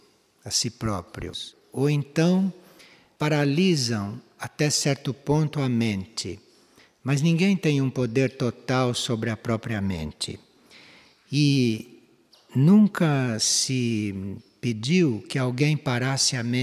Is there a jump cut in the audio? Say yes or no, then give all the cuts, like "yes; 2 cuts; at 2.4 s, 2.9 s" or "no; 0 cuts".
no; 0 cuts